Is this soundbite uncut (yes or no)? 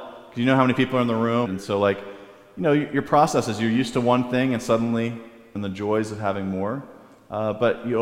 no